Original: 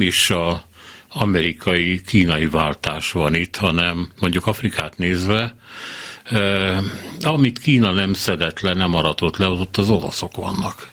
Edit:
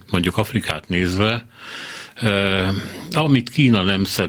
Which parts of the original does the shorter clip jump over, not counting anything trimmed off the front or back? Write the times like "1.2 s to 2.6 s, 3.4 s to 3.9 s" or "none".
none